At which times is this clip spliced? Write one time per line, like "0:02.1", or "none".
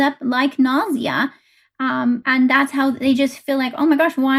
none